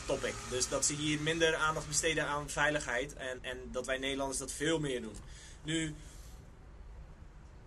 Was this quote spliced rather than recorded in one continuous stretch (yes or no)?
yes